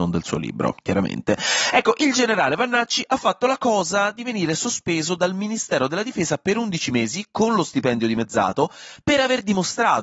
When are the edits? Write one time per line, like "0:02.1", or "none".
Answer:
none